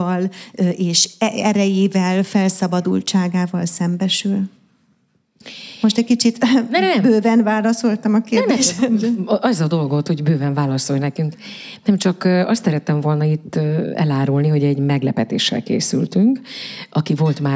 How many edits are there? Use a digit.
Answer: 0